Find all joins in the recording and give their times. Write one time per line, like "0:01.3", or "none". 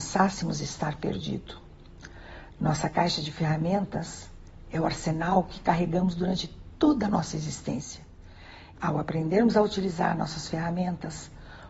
0:08.7